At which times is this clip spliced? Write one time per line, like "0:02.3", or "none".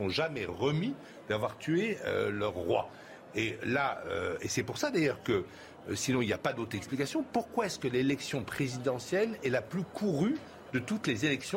none